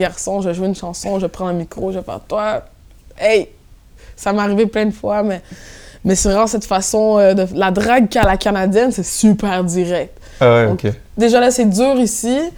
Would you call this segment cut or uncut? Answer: uncut